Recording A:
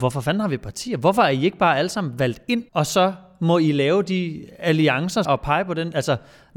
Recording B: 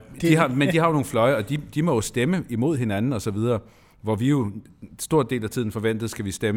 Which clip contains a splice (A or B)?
A